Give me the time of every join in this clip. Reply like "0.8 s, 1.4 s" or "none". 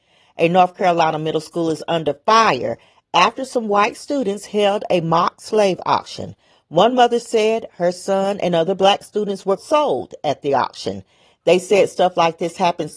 9.6 s